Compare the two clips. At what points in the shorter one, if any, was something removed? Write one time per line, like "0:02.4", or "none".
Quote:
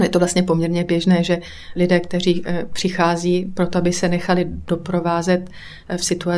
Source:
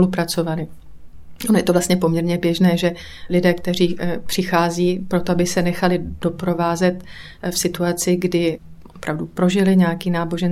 none